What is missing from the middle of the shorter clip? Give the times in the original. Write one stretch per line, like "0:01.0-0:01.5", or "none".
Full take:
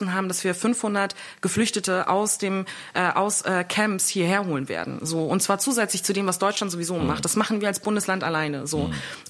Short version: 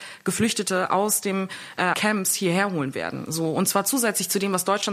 0:03.1-0:03.7